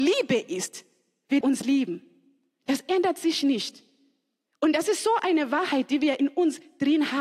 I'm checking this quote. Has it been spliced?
yes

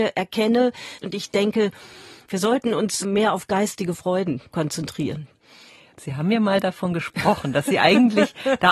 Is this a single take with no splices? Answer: no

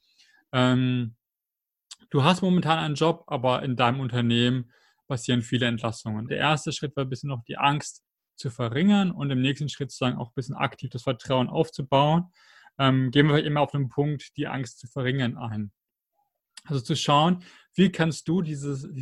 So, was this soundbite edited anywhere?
yes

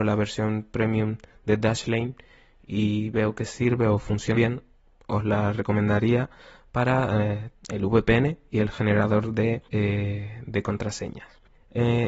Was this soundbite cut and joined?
yes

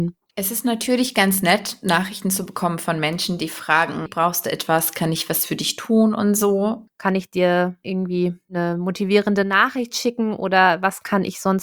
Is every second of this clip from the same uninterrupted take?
no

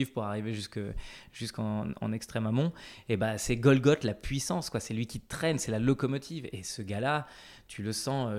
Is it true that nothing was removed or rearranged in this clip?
yes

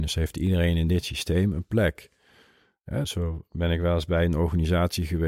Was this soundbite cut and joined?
yes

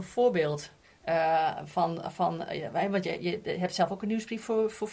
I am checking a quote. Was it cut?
no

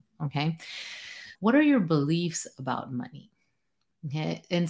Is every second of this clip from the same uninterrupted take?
no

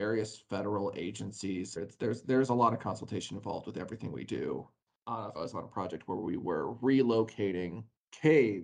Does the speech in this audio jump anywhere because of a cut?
yes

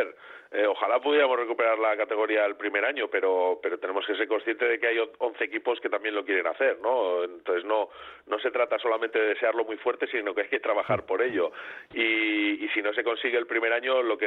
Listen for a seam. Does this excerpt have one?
no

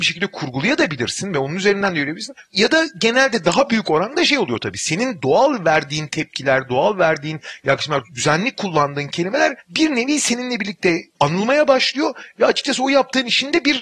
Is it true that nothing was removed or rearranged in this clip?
yes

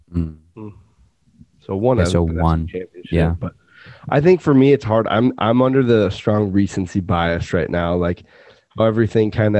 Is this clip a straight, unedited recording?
yes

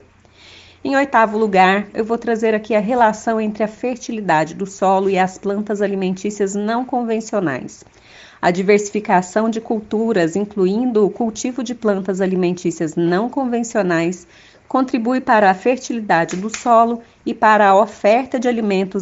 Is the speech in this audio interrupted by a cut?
yes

